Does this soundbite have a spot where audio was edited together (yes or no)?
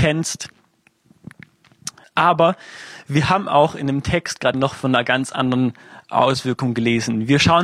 yes